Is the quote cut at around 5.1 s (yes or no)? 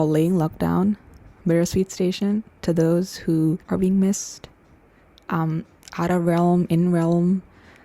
no